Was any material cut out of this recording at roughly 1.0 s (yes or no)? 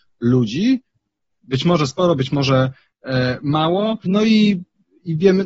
no